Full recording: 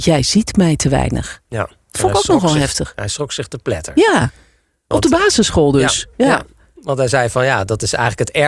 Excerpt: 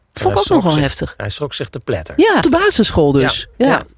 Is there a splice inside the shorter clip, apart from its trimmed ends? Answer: yes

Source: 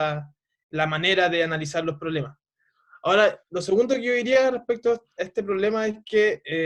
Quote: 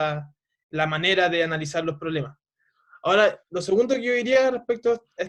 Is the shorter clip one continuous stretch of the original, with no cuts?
yes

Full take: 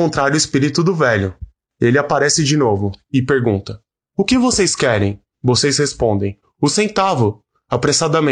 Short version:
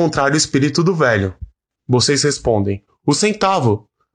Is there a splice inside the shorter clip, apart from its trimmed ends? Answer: yes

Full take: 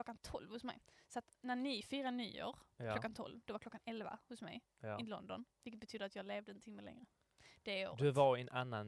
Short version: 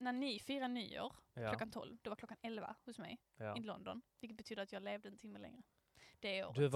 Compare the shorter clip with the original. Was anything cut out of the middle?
no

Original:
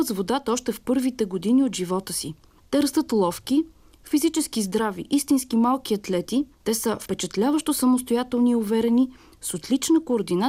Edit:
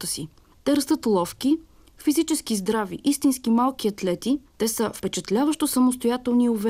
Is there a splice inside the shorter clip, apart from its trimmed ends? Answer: no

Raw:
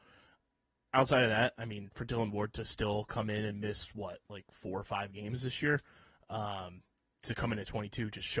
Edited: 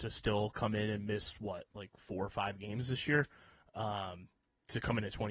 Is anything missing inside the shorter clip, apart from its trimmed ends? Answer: no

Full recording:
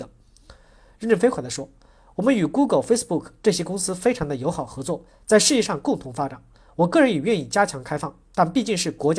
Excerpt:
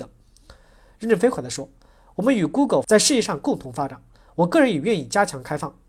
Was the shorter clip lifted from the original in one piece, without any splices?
no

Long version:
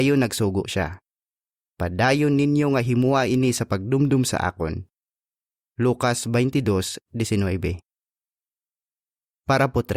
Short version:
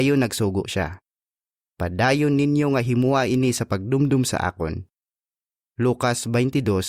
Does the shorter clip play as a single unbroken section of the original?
yes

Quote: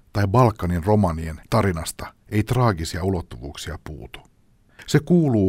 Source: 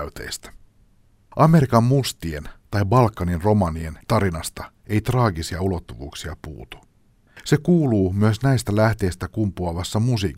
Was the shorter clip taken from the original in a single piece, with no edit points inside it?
yes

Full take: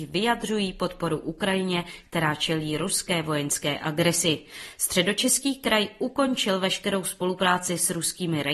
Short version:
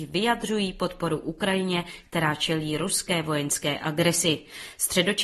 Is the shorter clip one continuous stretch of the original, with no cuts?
yes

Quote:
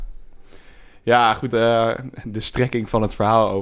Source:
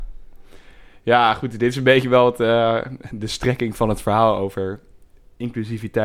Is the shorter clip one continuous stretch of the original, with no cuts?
no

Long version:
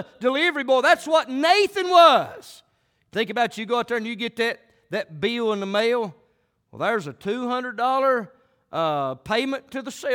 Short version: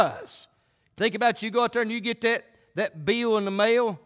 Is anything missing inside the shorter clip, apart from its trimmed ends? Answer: no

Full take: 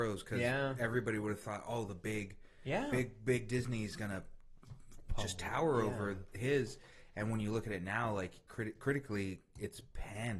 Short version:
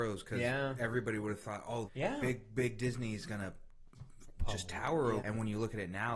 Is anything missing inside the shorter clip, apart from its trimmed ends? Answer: yes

